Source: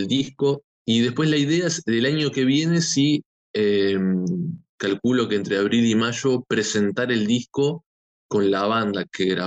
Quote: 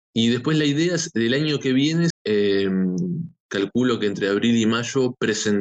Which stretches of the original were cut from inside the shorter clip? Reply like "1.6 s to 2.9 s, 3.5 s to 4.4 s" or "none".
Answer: 2.8 s to 3.4 s

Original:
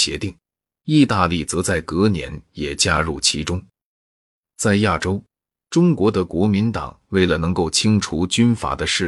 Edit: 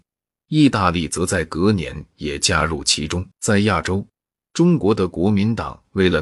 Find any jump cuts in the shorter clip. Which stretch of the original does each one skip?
3.7 s to 4.5 s

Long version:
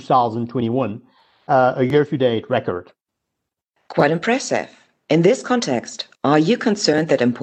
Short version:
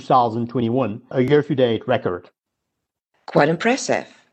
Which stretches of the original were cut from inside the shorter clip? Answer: 1.1 s to 1.7 s

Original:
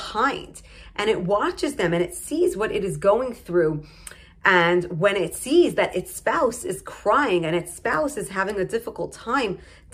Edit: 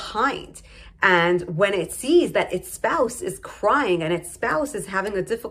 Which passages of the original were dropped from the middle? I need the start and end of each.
0.9 s to 4.3 s

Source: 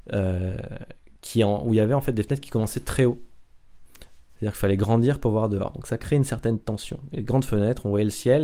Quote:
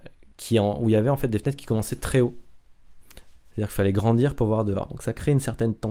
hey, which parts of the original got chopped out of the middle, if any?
none

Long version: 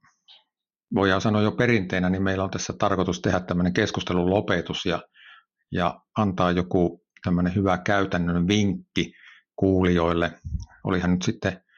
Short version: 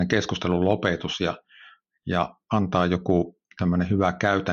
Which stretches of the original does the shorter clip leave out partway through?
none

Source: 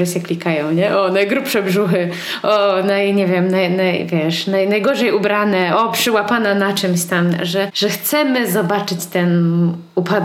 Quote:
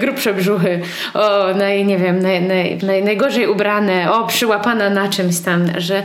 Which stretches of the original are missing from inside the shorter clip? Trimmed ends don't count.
4.1 s to 4.4 s

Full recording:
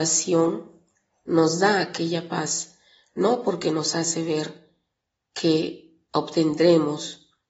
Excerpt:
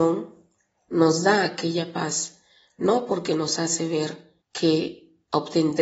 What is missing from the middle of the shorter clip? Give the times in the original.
4.8 s to 5.2 s

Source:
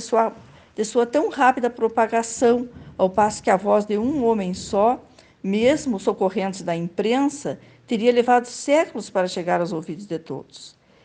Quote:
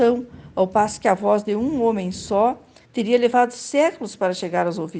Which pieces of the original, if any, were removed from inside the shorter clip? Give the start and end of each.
5.3 s to 7.8 s

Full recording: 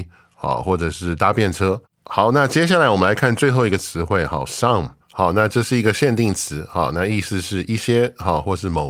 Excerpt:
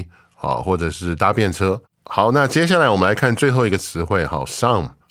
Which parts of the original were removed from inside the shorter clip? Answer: none

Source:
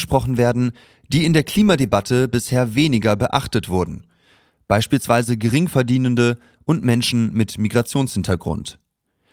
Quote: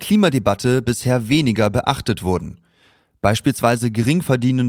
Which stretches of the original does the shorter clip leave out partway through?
none

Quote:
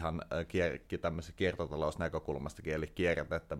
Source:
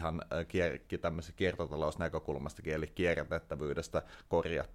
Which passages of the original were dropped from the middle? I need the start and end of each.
none

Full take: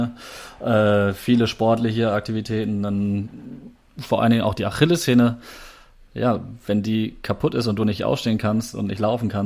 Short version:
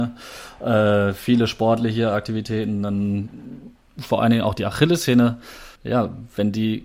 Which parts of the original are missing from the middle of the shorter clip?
5.8 s to 6.1 s

